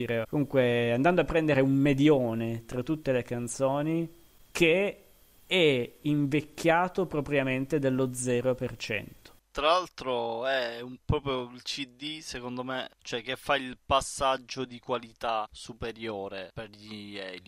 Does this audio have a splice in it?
no; 0 cuts

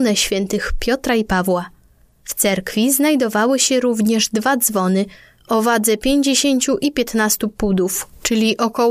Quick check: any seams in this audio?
no; 0 cuts

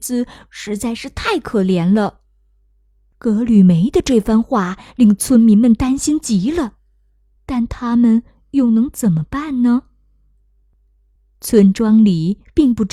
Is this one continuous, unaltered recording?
yes; 0 cuts

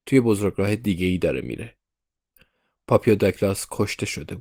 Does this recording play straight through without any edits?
yes; 0 cuts

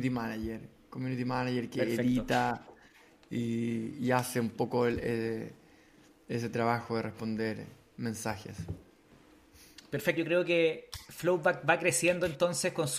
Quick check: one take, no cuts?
no; 1 cut; at 10.2 s

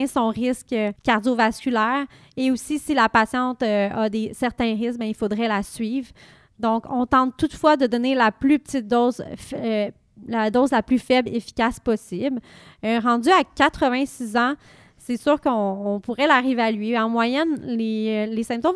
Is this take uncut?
yes; 0 cuts

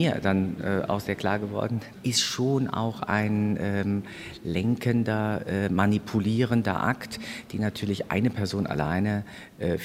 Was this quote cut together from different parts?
no; 0 cuts

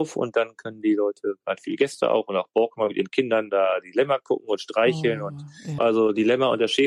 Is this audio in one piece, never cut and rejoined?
no; 1 cut; at 5.8 s

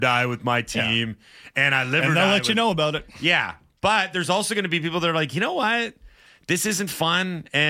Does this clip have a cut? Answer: no; 0 cuts

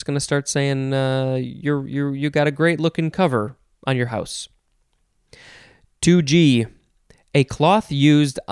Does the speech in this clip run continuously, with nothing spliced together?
yes; 0 cuts

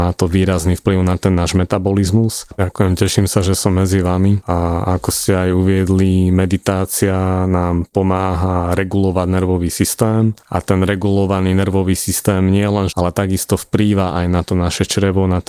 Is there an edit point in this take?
yes; 2 cuts; at 2.5 s, 12.9 s

